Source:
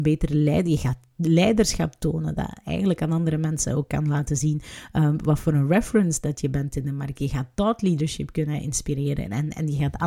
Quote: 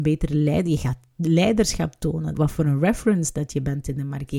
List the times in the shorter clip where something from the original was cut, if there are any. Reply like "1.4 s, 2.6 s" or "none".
2.3 s